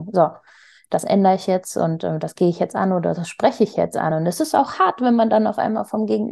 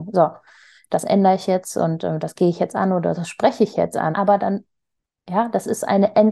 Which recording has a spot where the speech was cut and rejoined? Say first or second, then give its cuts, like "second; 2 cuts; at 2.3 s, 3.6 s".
second; 1 cut; at 4.1 s